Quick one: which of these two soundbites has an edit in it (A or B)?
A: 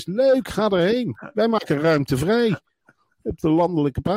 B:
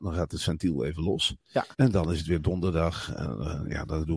B